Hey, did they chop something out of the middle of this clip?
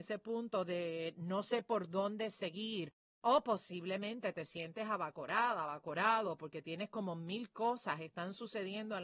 no; 0 cuts

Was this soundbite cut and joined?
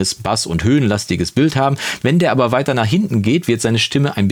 no; 0 cuts

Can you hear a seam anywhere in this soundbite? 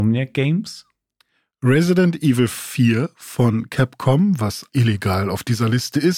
yes; 1 cut; at 4.7 s

